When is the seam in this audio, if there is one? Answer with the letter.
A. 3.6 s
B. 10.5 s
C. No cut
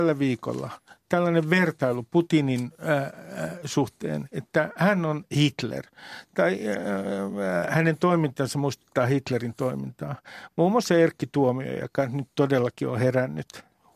C